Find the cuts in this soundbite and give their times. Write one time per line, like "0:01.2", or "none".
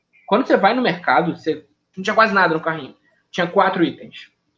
0:01.9